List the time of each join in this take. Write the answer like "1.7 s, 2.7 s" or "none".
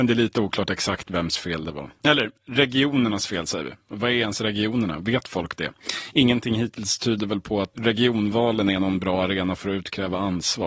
7.7 s